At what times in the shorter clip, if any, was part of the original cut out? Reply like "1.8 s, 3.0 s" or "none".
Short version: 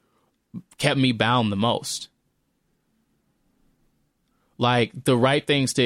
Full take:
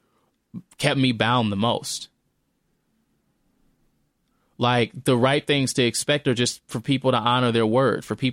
none